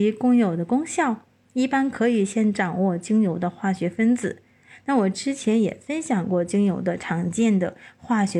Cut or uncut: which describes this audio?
uncut